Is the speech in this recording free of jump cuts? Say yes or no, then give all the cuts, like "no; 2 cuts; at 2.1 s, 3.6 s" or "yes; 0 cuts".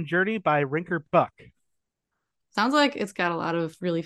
no; 1 cut; at 2.4 s